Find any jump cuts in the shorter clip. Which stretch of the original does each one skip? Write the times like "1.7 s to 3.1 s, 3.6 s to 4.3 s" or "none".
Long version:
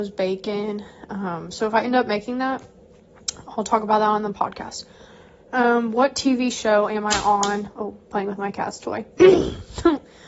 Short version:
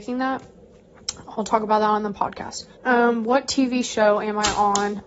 4.9 s to 5.4 s